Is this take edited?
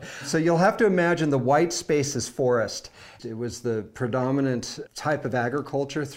yes; 2 cuts; at 3.2 s, 4.9 s

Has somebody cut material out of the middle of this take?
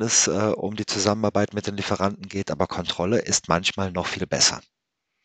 no; 0 cuts

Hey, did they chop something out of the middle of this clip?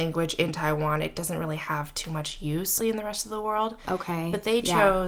yes; 1 cut; at 2.8 s

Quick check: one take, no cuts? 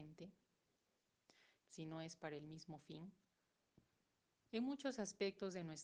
no; 1 cut; at 1.6 s

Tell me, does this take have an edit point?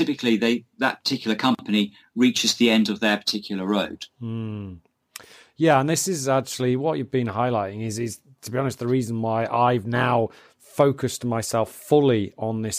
no; 0 cuts

